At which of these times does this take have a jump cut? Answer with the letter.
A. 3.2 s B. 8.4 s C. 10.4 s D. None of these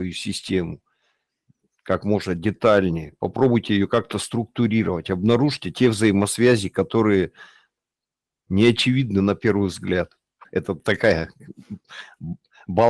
C